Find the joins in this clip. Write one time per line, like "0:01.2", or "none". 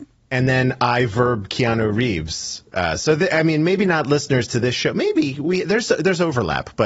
none